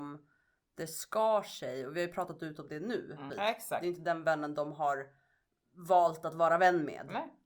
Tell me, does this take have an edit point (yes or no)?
yes